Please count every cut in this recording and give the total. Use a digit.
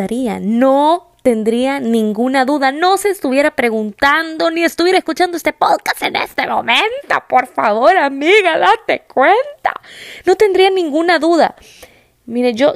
0